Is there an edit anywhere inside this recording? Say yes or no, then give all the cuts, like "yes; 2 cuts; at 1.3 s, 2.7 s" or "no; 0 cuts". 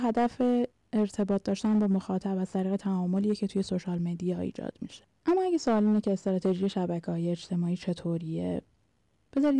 yes; 1 cut; at 5.1 s